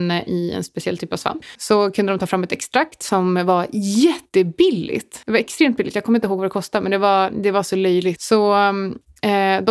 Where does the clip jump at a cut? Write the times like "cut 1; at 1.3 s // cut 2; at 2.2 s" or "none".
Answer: cut 1; at 8.2 s